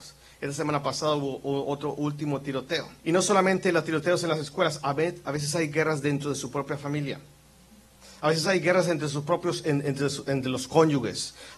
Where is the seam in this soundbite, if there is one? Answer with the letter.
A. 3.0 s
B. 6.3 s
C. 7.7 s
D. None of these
A